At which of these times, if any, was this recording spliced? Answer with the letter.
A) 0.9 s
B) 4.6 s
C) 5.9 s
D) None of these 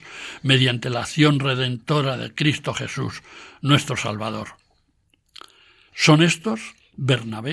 C